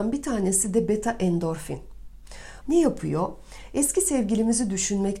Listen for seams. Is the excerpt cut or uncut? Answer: cut